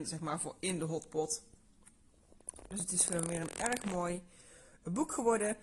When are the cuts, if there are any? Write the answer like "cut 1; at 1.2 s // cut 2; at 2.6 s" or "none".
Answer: none